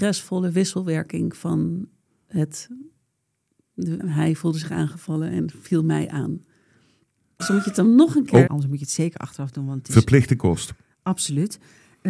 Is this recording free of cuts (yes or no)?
no